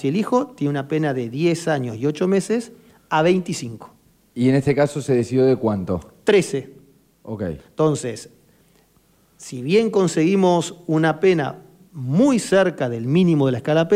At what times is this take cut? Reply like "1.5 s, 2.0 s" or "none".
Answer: none

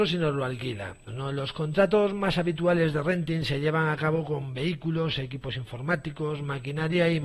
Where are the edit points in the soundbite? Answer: 1.1 s

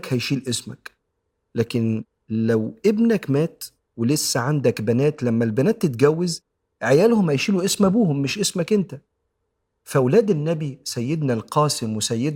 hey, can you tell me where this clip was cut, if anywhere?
none

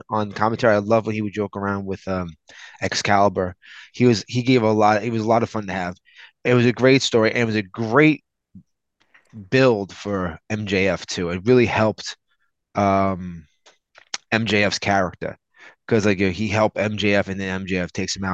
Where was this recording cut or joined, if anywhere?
none

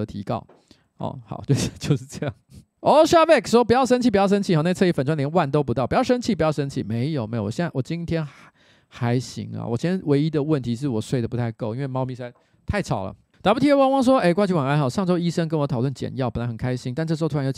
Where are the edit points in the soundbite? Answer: none

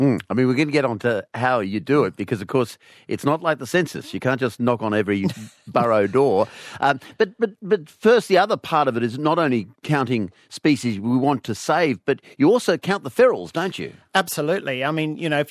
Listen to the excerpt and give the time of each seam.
none

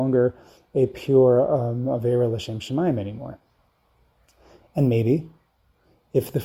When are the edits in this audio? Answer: none

